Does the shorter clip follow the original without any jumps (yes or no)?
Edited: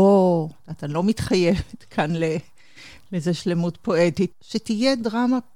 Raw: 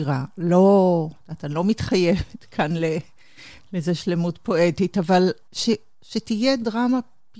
no